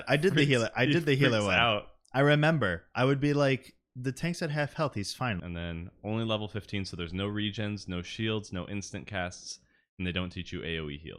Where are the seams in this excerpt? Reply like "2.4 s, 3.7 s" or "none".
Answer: 5.4 s